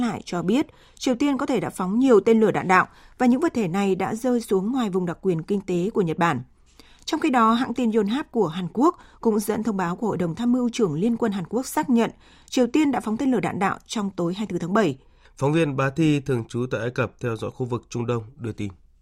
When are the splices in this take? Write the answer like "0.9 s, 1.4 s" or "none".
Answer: 15.3 s